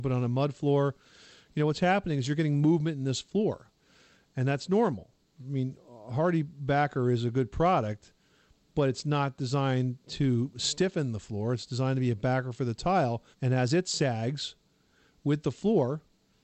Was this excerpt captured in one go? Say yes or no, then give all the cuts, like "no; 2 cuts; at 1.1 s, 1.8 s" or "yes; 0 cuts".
no; 1 cut; at 13.3 s